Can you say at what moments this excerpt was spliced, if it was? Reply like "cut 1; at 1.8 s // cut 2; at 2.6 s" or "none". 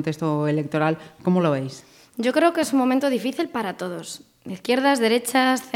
none